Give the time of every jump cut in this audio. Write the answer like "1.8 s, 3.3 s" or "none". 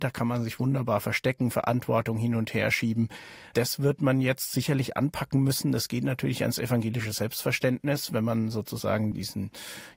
none